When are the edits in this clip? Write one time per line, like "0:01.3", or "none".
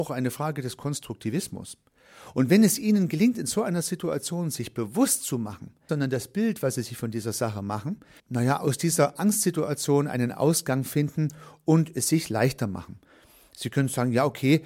0:05.9
0:08.2